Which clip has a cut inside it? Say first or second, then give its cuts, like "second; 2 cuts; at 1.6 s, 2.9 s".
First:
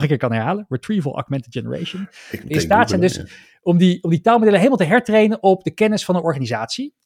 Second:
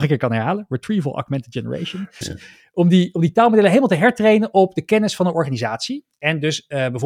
second; 1 cut; at 2.2 s